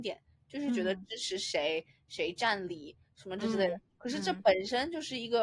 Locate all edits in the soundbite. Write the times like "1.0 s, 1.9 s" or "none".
none